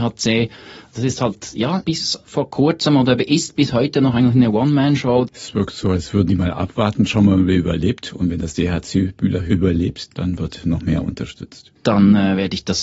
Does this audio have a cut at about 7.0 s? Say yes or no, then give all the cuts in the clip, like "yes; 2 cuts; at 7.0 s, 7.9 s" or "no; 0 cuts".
no; 2 cuts; at 5.3 s, 10.1 s